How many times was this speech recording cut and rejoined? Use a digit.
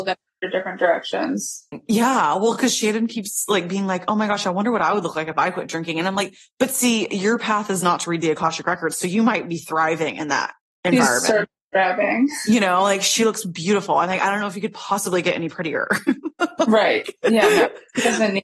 0